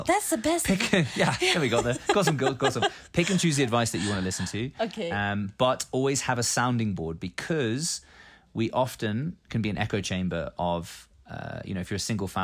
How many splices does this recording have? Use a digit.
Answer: 0